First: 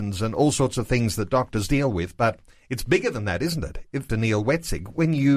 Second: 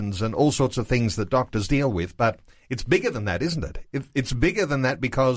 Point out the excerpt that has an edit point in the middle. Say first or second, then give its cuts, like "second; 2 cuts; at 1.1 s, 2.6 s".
first; 1 cut; at 4.1 s